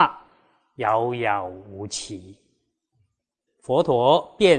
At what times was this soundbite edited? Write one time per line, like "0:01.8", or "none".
0:03.5